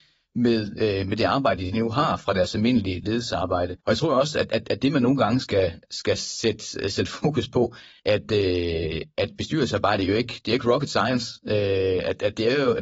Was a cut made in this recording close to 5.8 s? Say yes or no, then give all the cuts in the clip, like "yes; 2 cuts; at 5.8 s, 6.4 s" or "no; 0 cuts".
no; 2 cuts; at 3.8 s, 8.0 s